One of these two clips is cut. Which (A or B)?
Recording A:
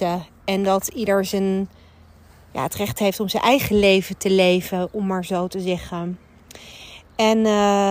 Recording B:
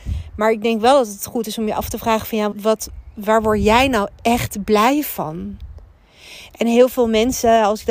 B